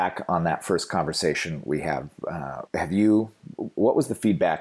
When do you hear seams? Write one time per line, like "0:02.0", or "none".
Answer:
0:02.7

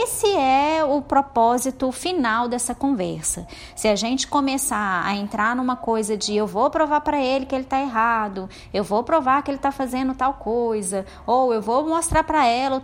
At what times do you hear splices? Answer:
none

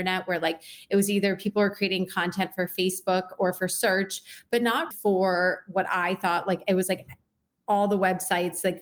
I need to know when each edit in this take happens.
0:04.9

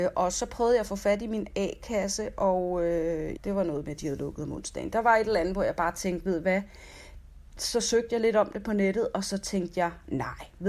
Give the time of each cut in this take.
0:03.4

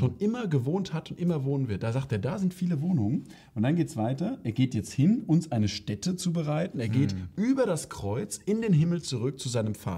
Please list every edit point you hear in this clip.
none

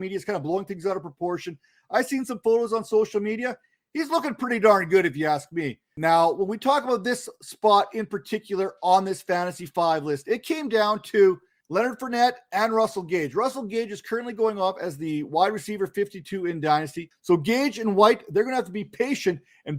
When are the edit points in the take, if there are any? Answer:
0:17.1

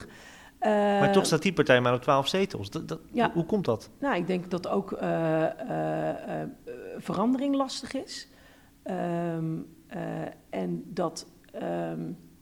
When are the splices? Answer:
none

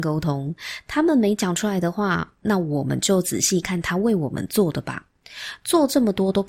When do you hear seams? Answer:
0:03.6

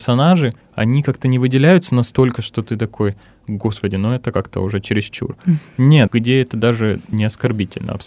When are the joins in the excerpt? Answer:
0:06.1
0:07.1

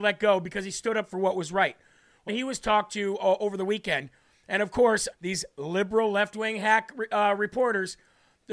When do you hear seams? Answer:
0:02.3
0:05.1

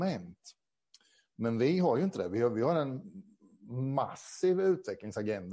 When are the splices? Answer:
none

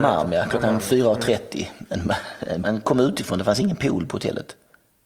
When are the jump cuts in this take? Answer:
0:02.6

